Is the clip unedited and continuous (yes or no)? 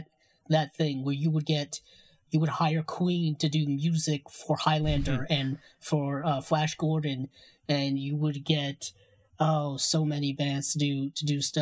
yes